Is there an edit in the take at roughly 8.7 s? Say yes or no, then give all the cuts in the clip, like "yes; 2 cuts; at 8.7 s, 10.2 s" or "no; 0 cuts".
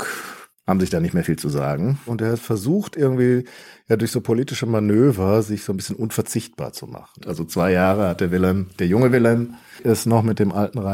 no; 2 cuts; at 2.1 s, 7.2 s